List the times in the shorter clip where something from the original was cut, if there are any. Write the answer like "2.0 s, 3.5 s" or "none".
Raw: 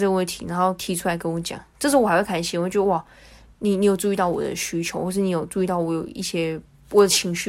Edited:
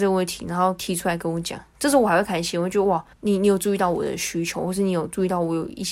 3.1 s